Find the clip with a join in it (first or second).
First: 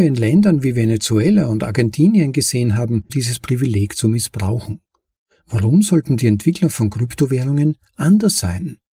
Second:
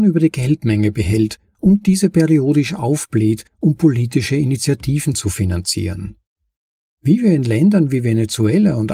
first